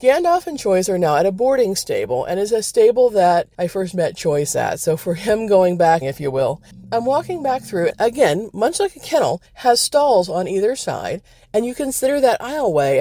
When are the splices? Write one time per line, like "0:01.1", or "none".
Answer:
0:06.0
0:07.9